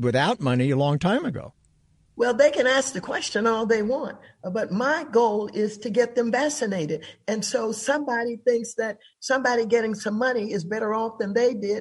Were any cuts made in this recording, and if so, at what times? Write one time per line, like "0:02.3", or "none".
none